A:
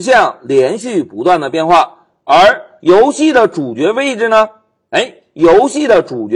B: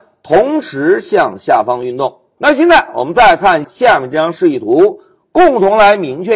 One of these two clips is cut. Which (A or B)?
B